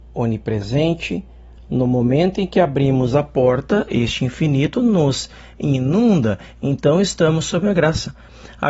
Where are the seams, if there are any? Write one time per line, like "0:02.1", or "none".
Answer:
none